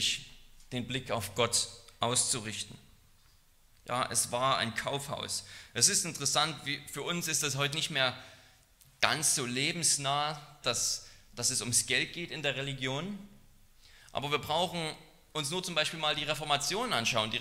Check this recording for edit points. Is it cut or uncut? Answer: cut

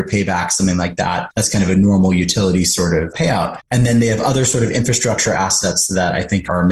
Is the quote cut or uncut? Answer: cut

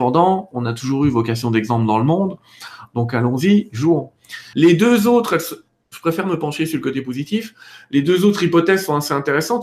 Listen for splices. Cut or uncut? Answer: cut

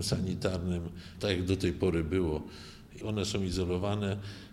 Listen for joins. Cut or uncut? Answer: cut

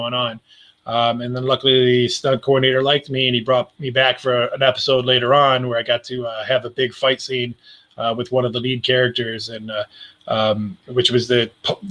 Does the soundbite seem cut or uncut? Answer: uncut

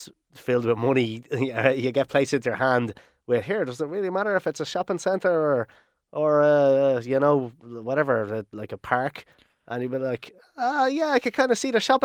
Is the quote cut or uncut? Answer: uncut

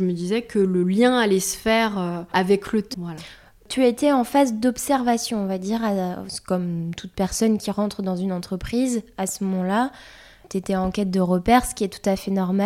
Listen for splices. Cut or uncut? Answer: cut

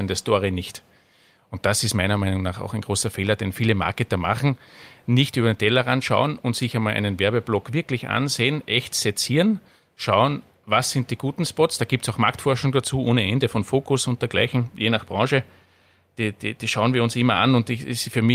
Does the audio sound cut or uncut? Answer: uncut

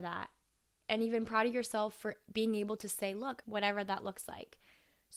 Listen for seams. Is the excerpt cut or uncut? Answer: cut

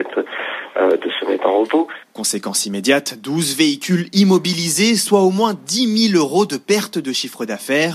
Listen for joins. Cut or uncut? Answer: uncut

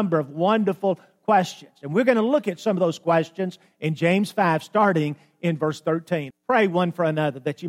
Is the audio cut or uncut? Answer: cut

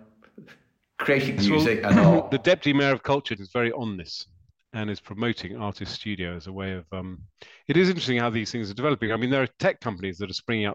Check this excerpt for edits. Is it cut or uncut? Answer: cut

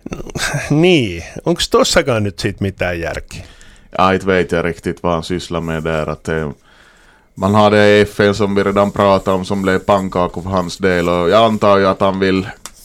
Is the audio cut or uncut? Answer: uncut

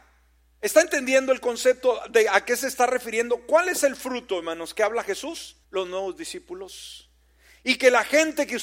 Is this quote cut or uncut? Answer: cut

